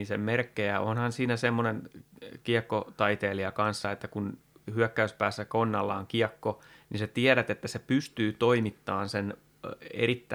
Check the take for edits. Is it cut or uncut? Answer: uncut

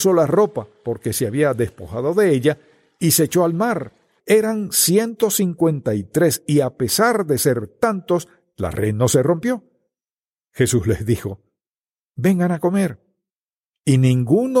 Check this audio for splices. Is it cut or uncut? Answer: cut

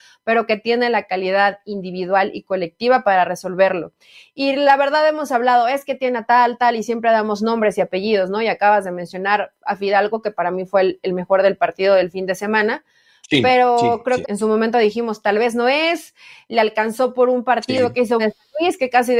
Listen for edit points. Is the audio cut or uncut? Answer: cut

